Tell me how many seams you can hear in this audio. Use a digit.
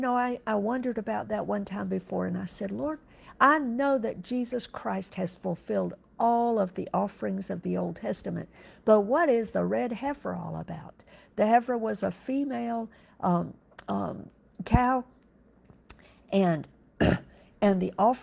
0